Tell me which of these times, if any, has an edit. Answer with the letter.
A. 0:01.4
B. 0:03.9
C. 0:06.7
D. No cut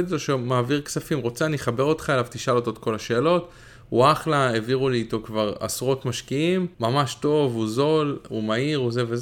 C